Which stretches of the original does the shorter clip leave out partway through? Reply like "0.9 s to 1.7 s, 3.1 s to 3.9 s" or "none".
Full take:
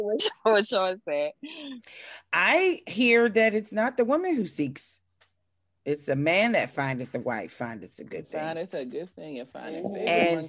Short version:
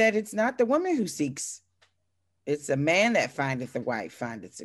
none